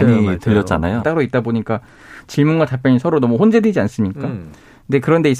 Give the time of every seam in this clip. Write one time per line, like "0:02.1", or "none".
0:01.0